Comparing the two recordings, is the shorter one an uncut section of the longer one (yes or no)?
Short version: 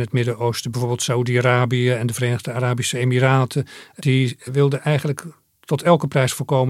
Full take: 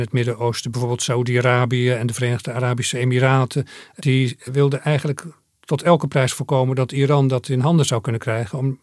yes